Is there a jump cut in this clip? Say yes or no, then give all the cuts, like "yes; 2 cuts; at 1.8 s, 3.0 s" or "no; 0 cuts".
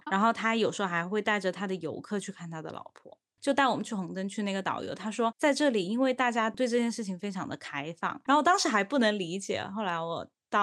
yes; 2 cuts; at 3.4 s, 8.3 s